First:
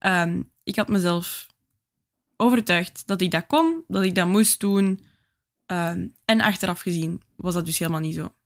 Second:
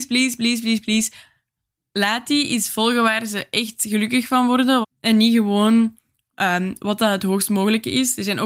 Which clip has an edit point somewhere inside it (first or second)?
second